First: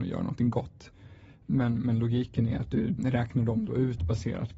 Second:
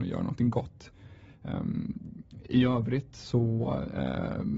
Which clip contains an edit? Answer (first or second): first